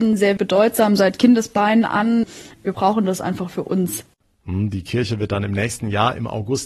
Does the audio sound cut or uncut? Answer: cut